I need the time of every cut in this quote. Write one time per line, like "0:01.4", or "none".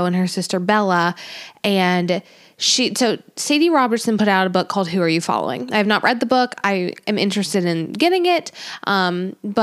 none